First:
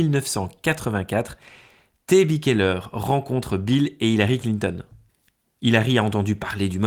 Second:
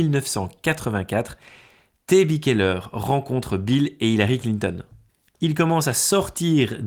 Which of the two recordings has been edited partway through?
second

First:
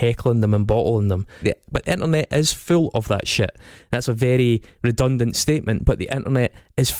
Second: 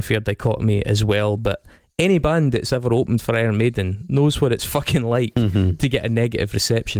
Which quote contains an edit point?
first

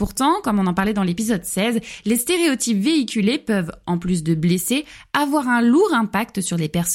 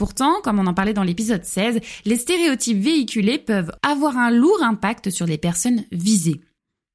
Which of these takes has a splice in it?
second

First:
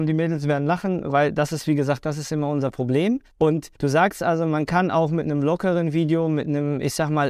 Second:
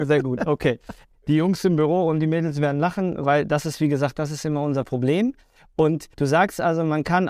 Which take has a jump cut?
first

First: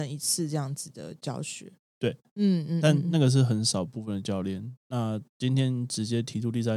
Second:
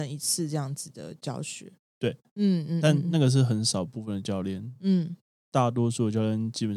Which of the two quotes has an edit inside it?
first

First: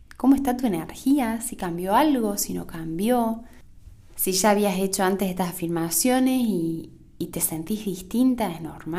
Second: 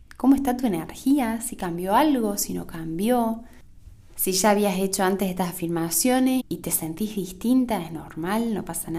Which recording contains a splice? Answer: second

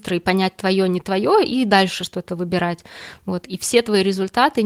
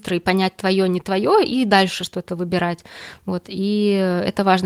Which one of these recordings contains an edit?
first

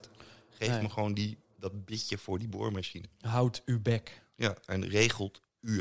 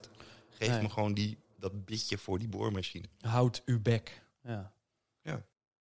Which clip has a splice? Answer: second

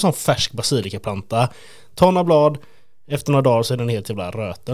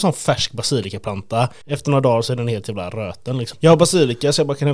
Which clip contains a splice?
second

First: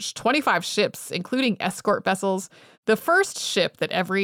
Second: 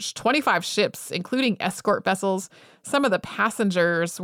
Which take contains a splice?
first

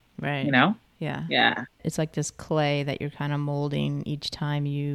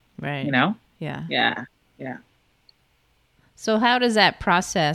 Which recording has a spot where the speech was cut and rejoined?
first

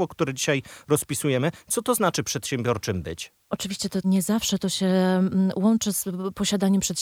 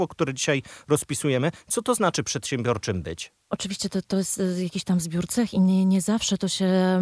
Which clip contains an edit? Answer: first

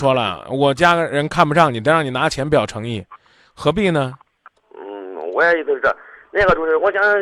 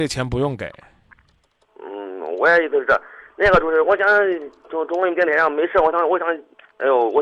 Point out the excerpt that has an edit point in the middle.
first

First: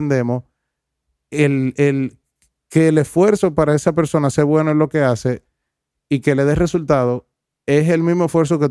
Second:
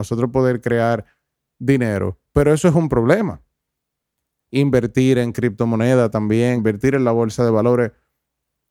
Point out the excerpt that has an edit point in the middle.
second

